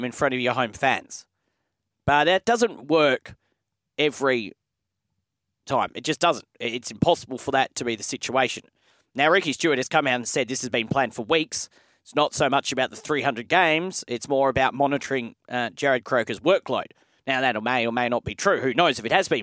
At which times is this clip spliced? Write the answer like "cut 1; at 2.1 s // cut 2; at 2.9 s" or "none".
none

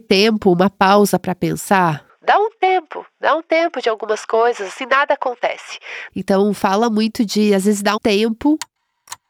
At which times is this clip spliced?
cut 1; at 6.1 s // cut 2; at 8.0 s

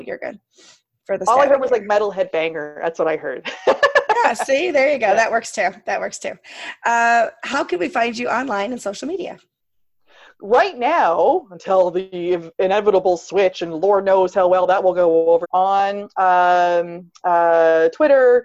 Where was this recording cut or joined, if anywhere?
cut 1; at 15.4 s

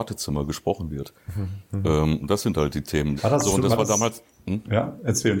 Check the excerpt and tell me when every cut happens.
cut 1; at 3.2 s

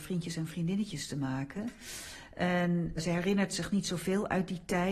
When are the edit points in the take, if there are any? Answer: cut 1; at 3.0 s

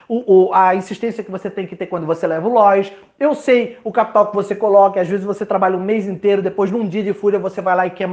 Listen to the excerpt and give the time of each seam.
none

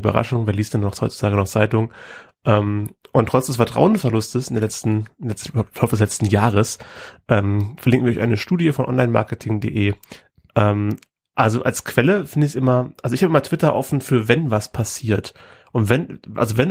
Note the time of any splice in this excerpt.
none

